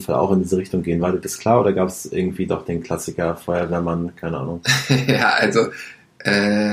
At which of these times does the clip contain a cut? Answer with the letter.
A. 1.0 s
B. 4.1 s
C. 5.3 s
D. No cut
D